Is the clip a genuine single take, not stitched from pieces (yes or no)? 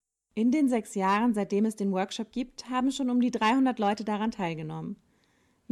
yes